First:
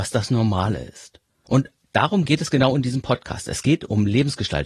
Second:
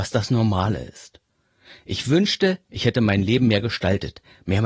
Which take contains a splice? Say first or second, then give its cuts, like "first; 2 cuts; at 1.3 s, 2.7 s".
first; 1 cut; at 1.5 s